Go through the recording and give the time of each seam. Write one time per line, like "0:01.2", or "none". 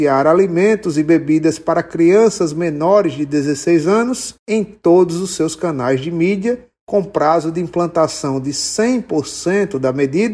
0:04.4